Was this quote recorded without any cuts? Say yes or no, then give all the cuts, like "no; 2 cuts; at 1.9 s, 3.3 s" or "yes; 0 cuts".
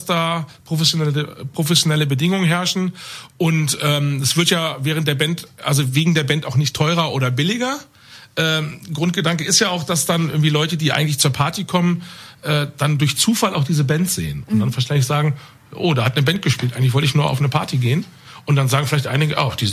yes; 0 cuts